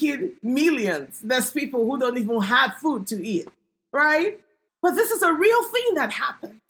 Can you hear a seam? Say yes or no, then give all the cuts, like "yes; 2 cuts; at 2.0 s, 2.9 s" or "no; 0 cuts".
yes; 1 cut; at 4.7 s